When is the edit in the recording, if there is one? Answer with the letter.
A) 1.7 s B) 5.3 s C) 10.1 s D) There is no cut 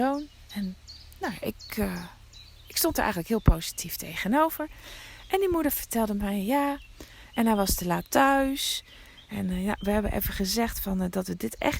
D